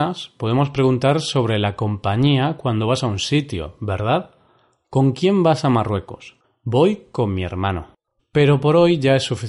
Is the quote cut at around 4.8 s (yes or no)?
no